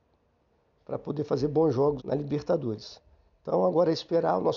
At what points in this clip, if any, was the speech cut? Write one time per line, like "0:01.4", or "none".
0:02.0